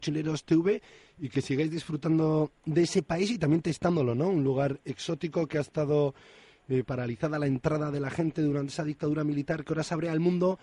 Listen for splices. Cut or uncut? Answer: cut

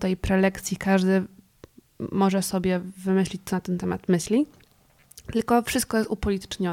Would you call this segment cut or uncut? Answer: uncut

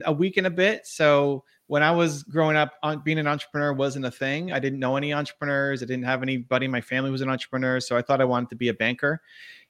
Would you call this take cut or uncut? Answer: uncut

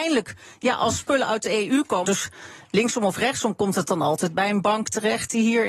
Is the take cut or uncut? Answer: cut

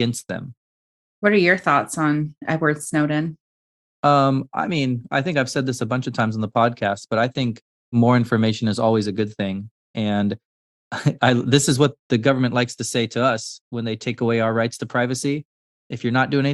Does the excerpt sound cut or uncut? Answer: uncut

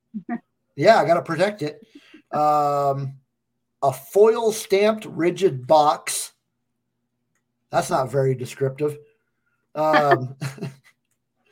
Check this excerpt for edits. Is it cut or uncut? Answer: uncut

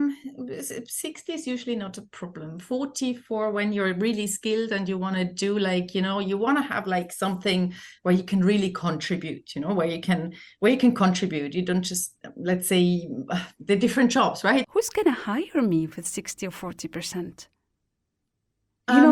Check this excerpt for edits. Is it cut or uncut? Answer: cut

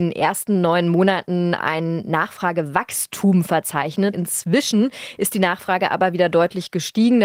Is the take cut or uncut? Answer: cut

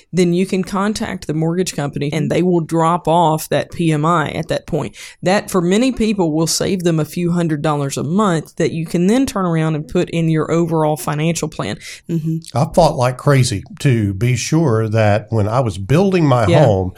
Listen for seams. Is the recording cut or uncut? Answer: cut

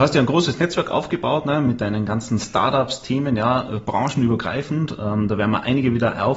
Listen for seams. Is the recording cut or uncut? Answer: uncut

